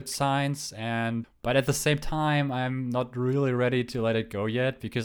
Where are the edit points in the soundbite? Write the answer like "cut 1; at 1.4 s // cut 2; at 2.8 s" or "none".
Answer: cut 1; at 1.2 s